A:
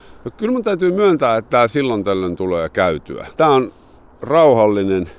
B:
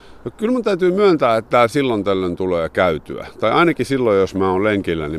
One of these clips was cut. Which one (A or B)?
A